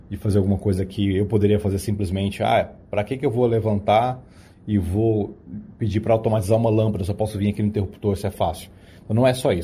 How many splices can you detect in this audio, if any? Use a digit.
0